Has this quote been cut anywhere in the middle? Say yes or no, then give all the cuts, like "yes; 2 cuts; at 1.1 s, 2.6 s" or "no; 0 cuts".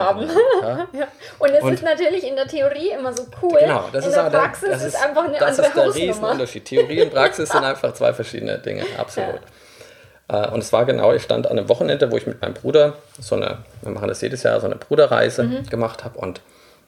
no; 0 cuts